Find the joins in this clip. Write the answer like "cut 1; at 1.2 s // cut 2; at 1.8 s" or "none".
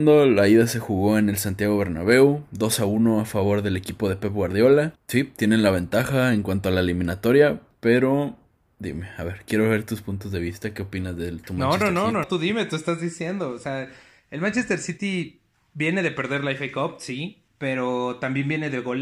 cut 1; at 12.2 s // cut 2; at 17.5 s